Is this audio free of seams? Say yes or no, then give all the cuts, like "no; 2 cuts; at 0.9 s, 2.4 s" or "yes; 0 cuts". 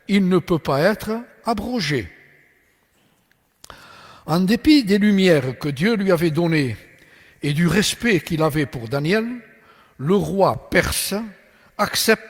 yes; 0 cuts